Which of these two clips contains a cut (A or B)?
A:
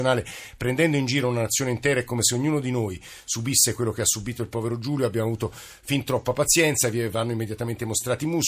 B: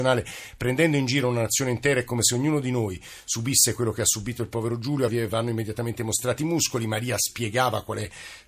B